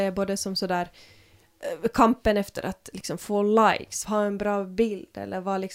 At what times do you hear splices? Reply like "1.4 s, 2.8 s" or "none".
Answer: 4.0 s